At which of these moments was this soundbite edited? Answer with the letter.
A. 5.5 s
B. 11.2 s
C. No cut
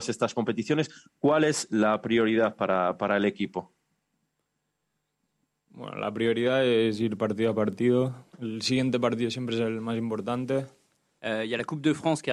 B